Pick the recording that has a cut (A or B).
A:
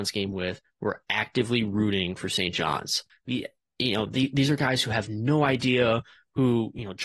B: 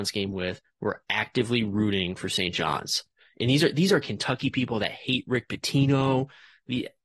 A